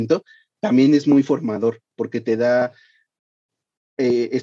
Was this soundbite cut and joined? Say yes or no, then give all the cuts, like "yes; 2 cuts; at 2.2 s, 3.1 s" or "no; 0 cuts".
no; 0 cuts